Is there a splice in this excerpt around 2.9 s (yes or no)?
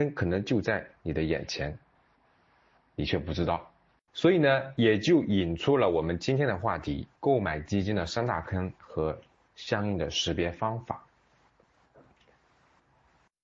no